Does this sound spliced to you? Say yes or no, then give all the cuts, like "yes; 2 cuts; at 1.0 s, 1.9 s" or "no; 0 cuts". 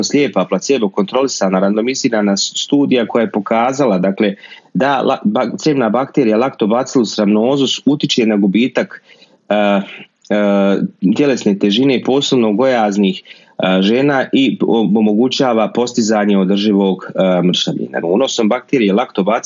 yes; 1 cut; at 18.0 s